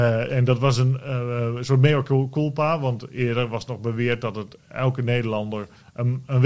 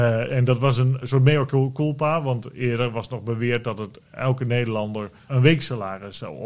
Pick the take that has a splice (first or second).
second